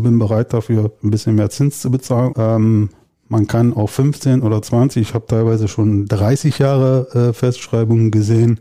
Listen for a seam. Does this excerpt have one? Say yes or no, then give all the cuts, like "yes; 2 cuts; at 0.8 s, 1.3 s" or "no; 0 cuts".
yes; 1 cut; at 2.3 s